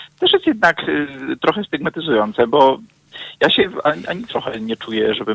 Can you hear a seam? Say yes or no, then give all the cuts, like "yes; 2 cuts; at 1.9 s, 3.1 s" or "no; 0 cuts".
no; 0 cuts